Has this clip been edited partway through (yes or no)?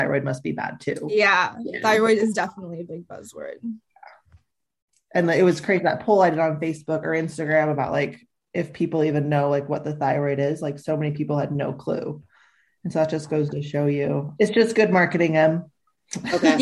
yes